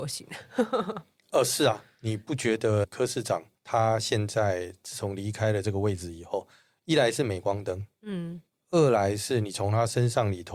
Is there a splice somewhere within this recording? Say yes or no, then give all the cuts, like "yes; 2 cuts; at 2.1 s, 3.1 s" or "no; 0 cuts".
yes; 1 cut; at 3.6 s